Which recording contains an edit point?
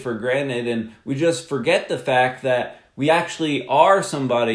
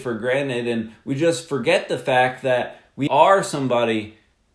second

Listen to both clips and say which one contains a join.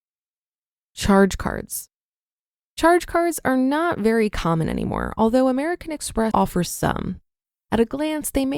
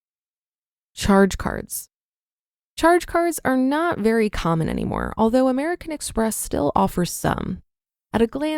first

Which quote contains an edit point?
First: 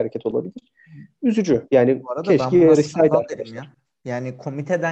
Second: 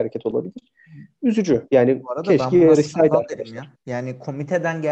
second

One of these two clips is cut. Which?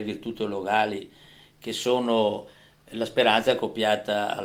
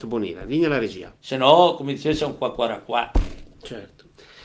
second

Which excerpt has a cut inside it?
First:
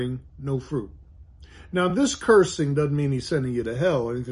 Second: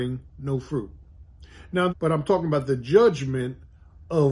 second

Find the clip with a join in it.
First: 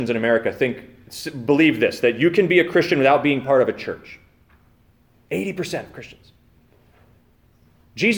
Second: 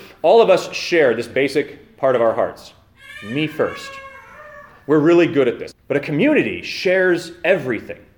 second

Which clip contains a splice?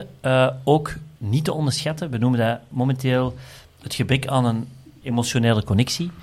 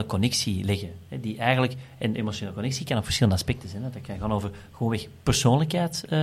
first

